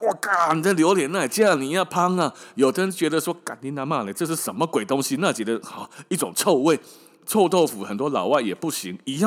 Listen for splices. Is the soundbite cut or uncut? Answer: uncut